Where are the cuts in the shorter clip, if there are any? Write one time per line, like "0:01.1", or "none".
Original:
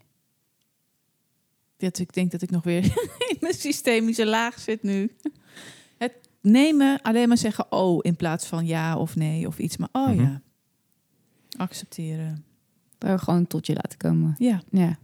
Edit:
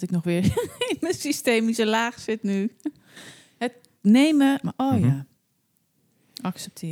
0:04.6